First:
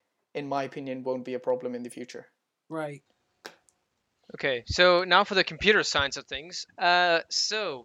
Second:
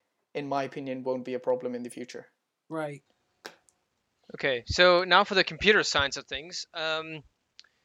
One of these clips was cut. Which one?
first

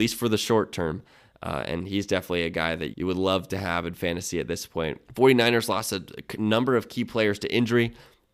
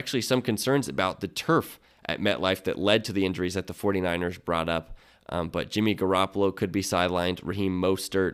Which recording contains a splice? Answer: first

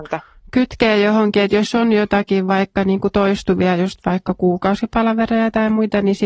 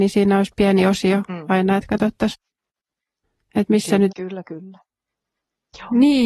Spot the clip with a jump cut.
second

